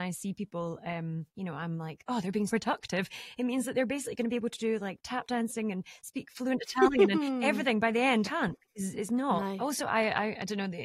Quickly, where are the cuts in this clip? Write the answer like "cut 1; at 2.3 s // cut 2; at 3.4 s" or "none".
cut 1; at 2.5 s // cut 2; at 8.2 s